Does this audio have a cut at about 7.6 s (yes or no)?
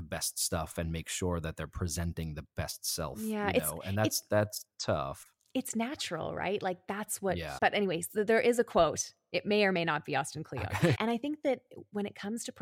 yes